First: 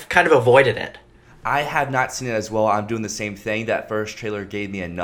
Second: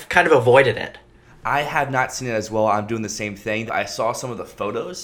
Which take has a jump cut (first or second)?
second